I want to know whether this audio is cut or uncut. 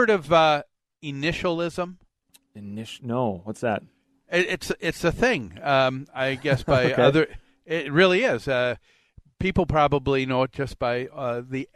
uncut